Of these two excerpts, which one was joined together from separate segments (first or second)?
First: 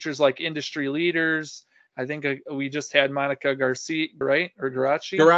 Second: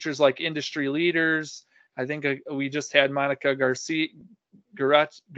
first